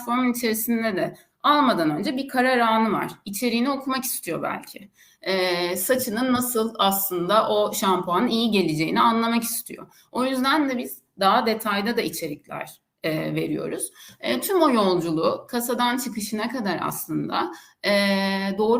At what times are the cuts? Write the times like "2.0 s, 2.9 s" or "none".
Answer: none

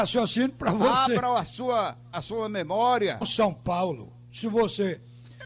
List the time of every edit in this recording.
2.1 s, 3.2 s

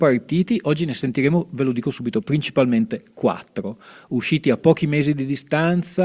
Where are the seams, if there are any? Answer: none

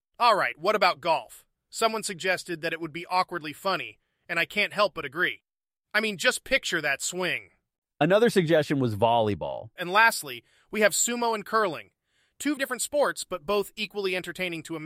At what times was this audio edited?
9.8 s, 12.6 s

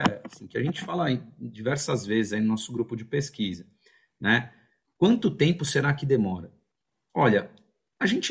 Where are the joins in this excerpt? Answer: none

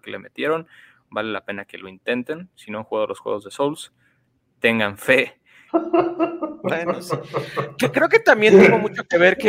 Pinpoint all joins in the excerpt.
5.7 s

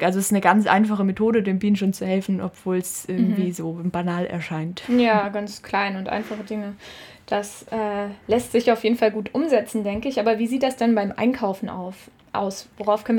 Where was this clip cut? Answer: none

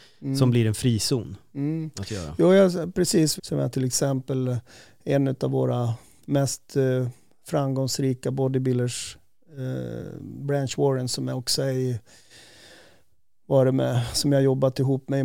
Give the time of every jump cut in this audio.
3.4 s

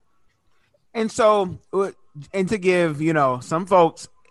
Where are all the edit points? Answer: 2.5 s

